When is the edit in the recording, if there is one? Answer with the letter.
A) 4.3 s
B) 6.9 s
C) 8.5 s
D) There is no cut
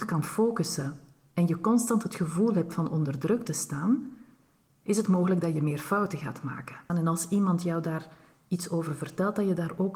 B